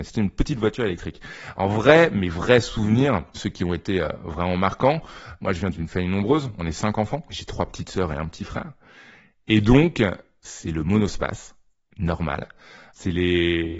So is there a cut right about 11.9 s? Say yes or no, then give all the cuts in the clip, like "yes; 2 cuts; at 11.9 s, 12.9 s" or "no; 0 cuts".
yes; 1 cut; at 11.9 s